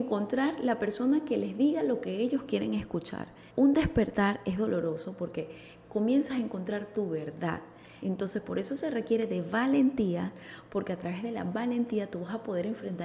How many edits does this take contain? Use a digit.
2